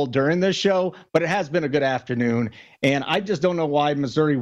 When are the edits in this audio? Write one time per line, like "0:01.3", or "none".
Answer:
none